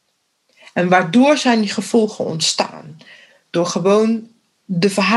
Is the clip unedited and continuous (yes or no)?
yes